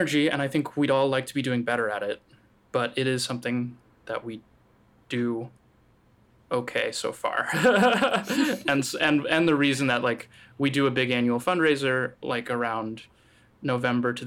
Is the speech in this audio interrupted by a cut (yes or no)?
no